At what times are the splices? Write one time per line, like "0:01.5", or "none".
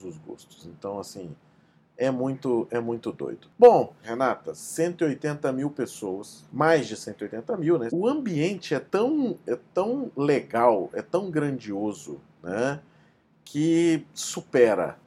0:04.0
0:07.9